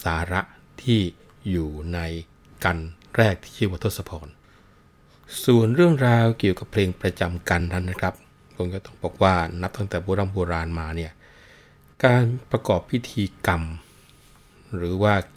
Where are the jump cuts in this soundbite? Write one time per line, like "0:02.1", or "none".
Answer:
none